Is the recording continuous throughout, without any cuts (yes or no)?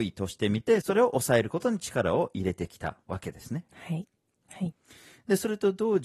no